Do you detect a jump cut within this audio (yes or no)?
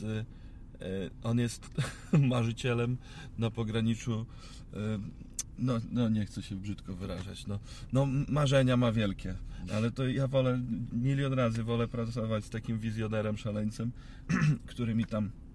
yes